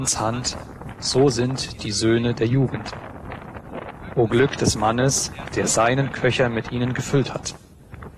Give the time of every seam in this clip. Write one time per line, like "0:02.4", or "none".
none